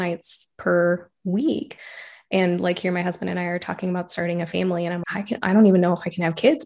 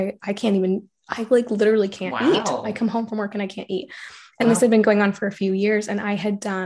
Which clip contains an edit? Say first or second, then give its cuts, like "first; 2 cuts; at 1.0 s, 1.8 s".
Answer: first; 1 cut; at 5.0 s